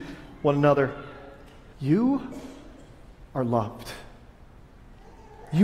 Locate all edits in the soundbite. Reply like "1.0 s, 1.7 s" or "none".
1.7 s